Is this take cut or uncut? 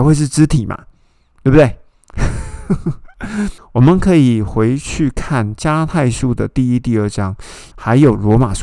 cut